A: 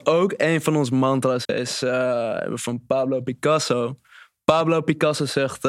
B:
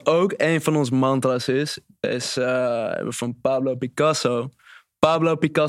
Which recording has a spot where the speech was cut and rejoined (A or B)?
A